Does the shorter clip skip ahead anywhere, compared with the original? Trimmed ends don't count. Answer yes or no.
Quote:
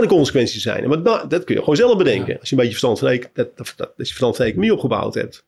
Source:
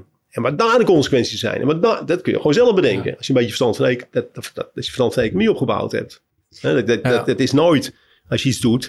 no